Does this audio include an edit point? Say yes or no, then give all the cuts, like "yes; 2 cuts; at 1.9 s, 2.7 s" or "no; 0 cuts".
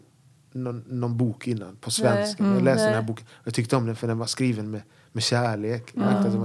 no; 0 cuts